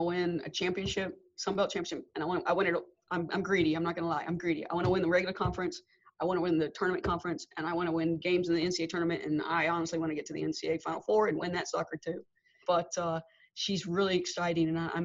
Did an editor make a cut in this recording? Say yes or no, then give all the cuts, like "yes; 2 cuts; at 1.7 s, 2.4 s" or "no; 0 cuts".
yes; 1 cut; at 12.6 s